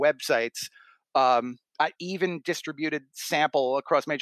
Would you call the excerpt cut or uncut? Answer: cut